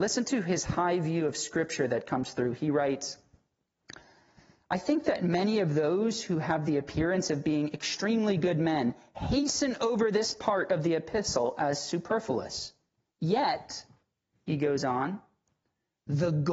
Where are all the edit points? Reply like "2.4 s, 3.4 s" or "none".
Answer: none